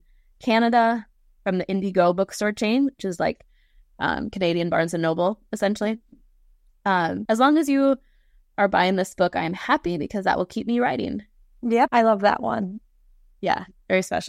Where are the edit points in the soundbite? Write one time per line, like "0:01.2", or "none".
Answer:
0:07.3
0:11.9